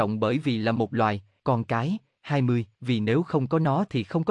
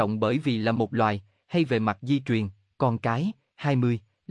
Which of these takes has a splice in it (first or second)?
first